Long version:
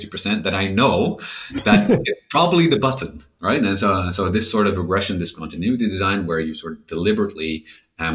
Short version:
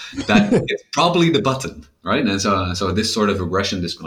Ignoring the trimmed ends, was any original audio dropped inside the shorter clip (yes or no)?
no